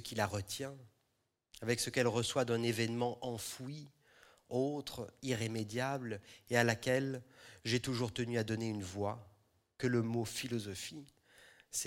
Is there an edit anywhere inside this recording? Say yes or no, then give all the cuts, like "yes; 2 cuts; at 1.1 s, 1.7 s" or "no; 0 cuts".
no; 0 cuts